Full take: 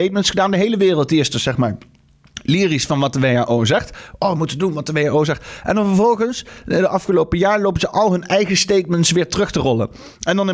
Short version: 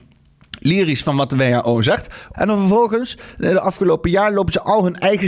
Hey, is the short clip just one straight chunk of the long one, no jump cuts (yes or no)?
no